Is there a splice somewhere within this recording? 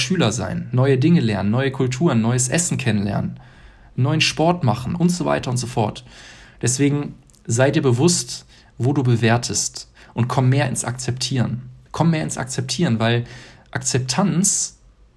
yes; 1 cut; at 11.9 s

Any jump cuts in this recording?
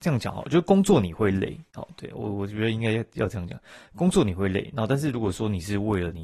no; 0 cuts

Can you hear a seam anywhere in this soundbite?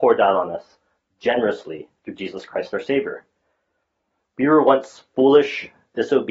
yes; 1 cut; at 4.2 s

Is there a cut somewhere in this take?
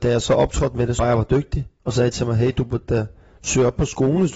yes; 1 cut; at 1.0 s

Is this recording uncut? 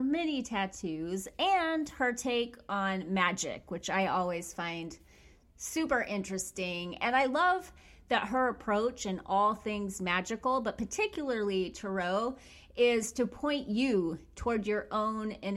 yes; 0 cuts

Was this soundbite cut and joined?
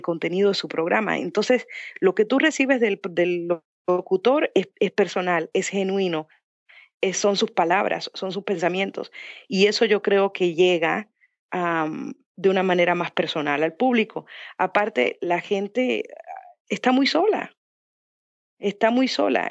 no; 0 cuts

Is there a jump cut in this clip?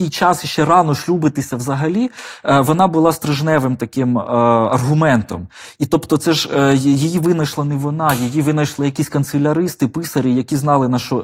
no; 0 cuts

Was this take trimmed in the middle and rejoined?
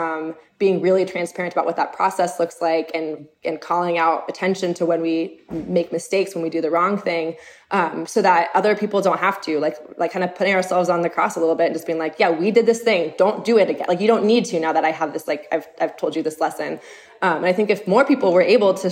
no; 0 cuts

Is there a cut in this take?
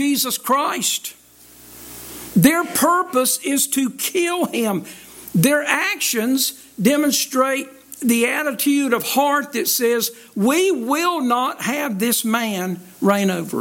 no; 0 cuts

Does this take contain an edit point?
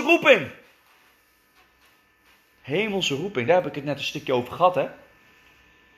no; 0 cuts

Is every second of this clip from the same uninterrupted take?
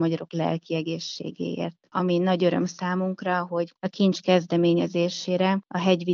yes; 0 cuts

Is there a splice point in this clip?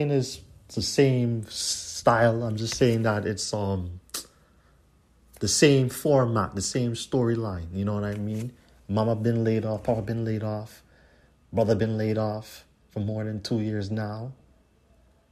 no; 0 cuts

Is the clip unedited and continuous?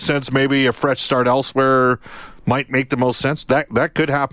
yes; 0 cuts

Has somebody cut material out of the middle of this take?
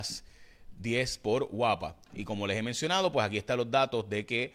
no; 0 cuts

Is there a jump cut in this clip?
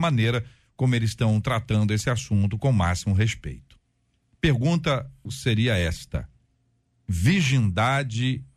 yes; 1 cut; at 5.3 s

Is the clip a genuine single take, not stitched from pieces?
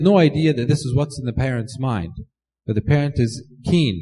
yes; 0 cuts

